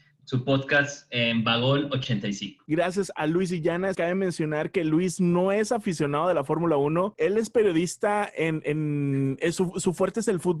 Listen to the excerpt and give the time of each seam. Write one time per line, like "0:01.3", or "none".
0:02.7
0:03.9